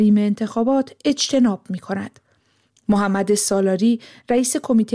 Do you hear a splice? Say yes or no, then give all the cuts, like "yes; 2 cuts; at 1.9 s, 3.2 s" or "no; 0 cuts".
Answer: no; 0 cuts